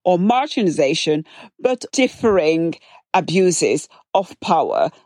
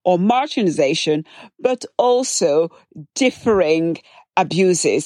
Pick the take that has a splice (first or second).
first